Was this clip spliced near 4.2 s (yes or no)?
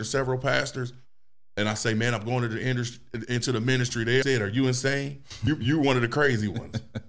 yes